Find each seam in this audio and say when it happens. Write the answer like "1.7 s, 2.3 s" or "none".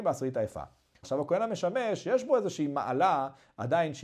1.0 s

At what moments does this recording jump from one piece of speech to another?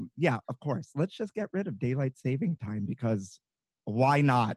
none

